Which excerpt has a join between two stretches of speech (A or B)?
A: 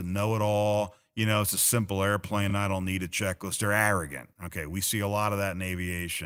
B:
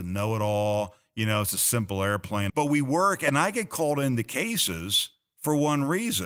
B